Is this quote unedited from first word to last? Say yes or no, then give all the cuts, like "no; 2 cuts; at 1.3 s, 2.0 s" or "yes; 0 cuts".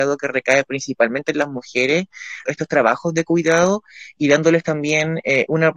no; 1 cut; at 2.4 s